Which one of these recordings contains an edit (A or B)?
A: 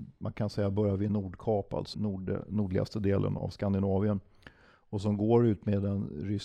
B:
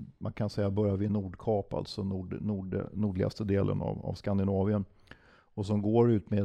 A